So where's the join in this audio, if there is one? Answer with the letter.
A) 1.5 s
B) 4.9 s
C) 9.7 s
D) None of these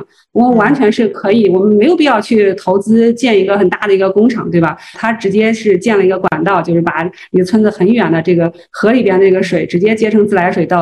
B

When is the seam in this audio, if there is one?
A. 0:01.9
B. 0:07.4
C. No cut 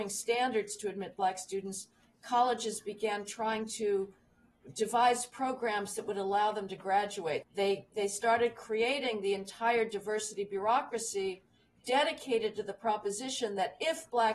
B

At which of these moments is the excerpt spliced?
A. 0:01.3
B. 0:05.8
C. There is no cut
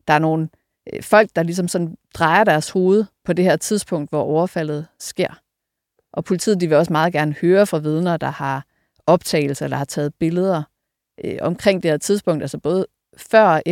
C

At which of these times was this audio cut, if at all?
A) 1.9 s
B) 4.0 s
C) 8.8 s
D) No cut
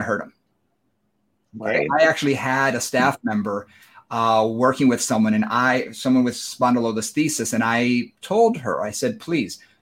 D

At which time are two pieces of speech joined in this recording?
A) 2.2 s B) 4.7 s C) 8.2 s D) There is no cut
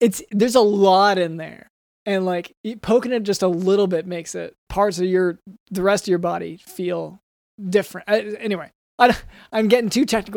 B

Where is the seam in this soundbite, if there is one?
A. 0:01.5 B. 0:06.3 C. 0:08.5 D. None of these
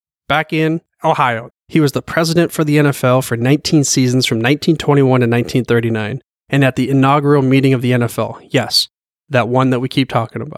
A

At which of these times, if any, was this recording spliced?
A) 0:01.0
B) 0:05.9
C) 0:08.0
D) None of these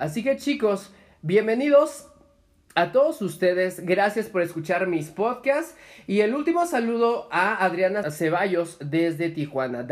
C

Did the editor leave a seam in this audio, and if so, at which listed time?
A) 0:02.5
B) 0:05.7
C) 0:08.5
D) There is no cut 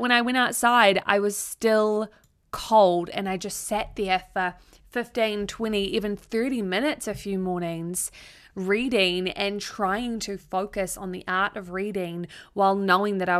D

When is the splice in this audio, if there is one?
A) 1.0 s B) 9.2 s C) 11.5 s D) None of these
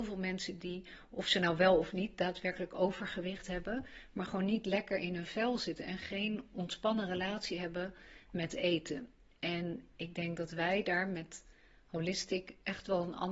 D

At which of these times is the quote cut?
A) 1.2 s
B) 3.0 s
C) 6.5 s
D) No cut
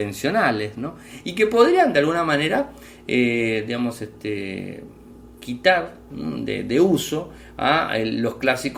D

